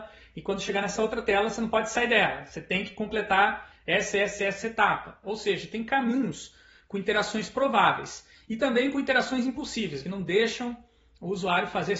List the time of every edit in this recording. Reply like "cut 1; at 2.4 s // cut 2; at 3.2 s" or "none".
cut 1; at 5.2 s // cut 2; at 10.0 s